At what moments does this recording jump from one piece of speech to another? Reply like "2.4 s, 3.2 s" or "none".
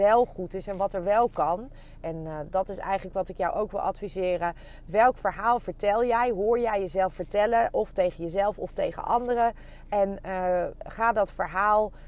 2.0 s